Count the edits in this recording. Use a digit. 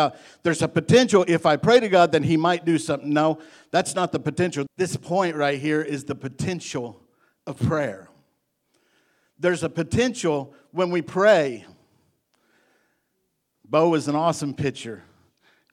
2